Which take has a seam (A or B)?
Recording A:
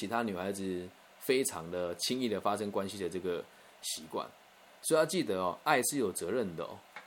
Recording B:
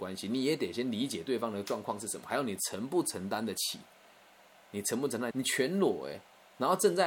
B